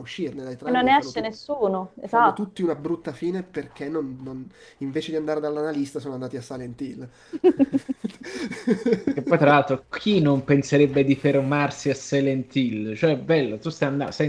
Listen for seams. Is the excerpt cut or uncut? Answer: uncut